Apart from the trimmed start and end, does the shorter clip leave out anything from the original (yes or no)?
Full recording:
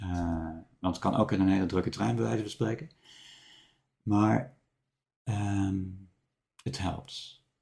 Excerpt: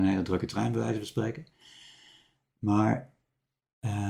no